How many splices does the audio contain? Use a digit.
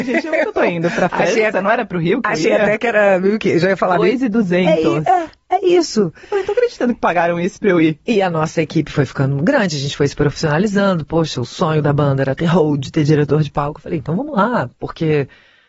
0